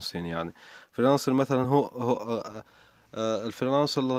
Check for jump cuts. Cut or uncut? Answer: uncut